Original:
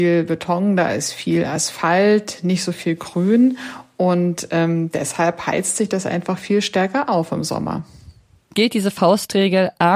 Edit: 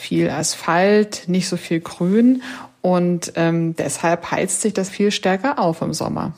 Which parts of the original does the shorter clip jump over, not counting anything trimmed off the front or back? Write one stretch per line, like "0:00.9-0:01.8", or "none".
0:06.0-0:06.4